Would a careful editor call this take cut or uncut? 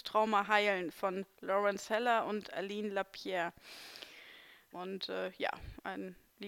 cut